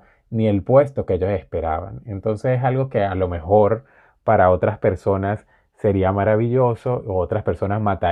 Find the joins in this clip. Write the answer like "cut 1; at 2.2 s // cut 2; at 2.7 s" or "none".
none